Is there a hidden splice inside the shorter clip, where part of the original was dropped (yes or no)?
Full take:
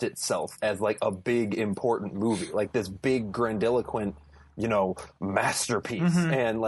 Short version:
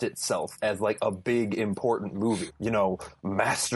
yes